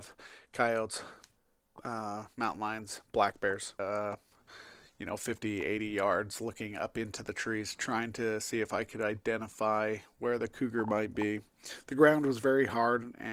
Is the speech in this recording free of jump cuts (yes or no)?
no